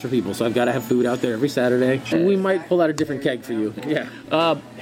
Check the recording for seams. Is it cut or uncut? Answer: cut